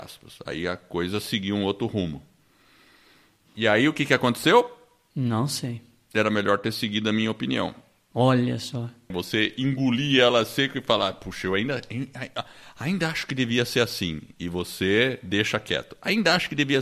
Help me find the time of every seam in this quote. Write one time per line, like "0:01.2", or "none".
0:09.1